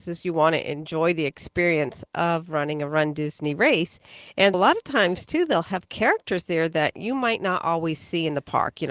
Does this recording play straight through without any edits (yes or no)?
no